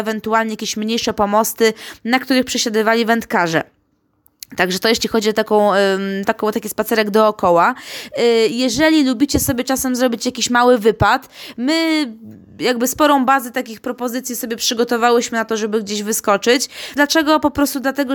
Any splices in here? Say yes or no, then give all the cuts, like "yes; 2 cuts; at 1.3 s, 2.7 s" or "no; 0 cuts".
yes; 1 cut; at 17.0 s